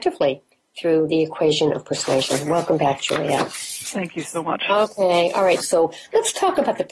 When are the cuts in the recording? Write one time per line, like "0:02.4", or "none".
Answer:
0:05.6